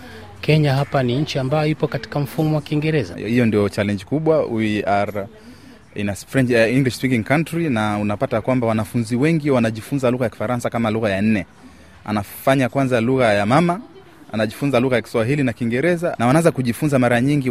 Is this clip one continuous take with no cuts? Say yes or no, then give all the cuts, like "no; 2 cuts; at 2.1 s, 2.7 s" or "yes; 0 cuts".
no; 2 cuts; at 3.1 s, 16.1 s